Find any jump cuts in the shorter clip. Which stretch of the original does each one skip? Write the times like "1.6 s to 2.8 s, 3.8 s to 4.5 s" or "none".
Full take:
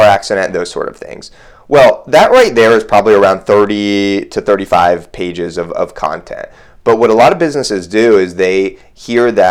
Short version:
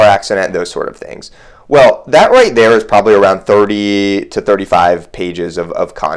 none